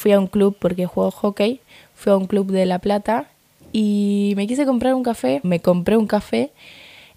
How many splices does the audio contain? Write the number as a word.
one